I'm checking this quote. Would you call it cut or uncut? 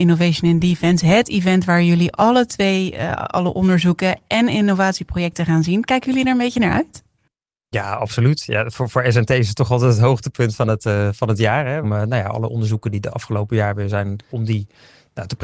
cut